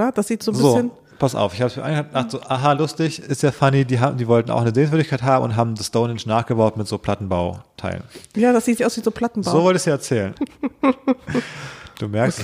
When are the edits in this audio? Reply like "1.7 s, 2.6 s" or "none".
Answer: 8.8 s, 10.3 s